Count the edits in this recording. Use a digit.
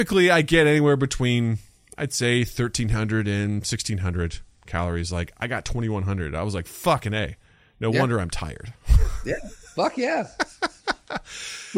0